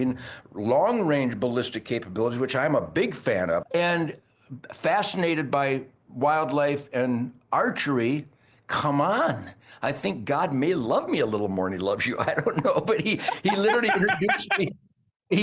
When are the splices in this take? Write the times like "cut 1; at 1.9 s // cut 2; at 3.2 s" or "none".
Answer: cut 1; at 3.6 s